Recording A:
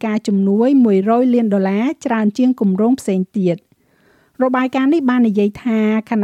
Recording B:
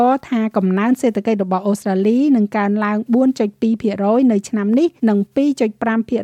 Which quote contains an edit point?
B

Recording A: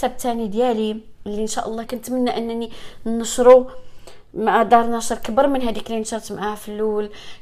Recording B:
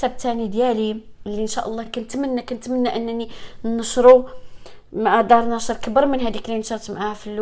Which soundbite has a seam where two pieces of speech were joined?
A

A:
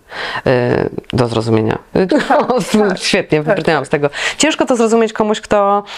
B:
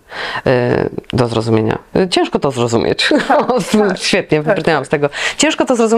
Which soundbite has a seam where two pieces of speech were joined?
A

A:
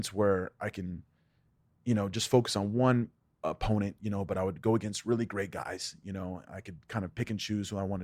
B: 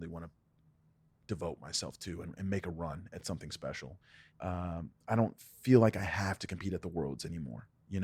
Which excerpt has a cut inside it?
B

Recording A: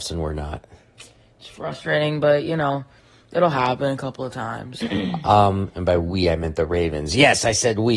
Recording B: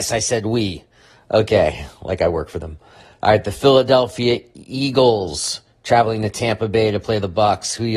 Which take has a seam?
A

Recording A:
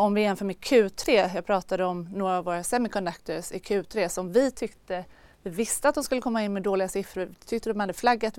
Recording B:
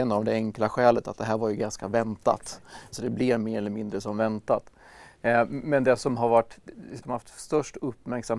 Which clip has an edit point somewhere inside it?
B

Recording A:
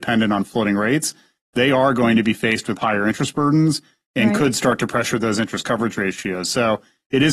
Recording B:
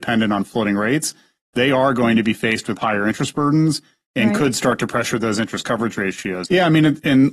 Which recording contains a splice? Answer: B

